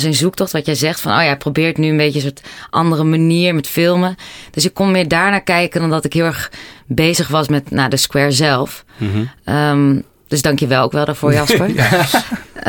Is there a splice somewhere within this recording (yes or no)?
no